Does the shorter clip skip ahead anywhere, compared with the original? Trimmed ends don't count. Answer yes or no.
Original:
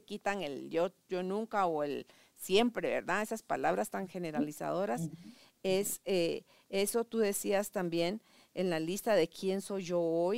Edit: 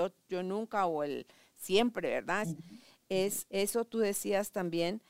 yes